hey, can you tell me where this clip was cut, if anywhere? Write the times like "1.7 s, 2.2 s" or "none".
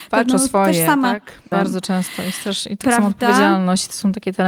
1.5 s